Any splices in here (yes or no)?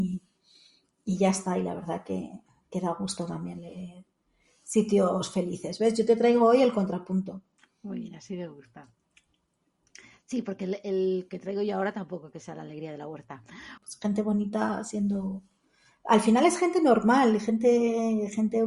yes